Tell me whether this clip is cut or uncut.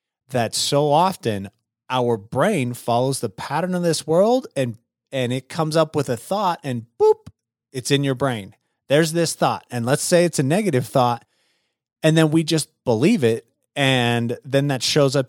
uncut